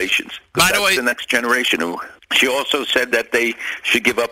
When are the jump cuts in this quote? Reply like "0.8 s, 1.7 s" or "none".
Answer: 2.2 s